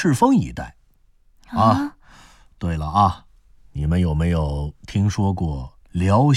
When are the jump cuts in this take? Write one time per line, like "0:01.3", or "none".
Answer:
0:01.4